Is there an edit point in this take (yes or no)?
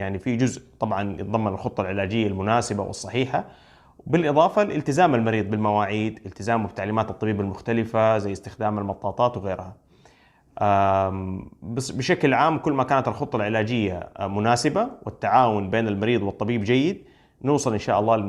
no